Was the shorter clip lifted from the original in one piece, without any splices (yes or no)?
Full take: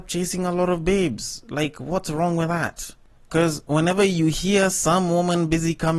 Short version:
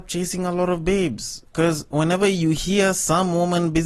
no